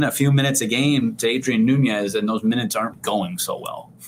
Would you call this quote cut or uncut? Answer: cut